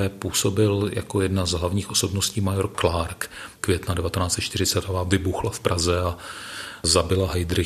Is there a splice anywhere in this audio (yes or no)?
yes